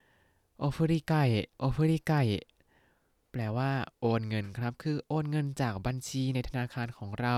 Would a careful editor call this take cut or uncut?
cut